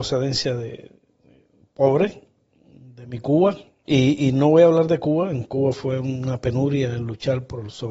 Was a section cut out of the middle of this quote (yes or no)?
no